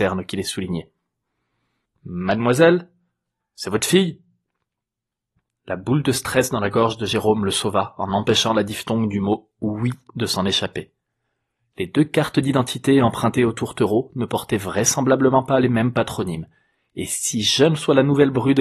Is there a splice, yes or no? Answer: yes